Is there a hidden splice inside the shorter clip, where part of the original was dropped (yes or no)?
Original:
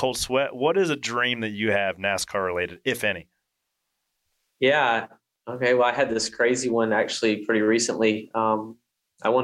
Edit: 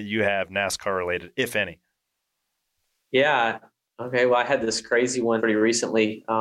yes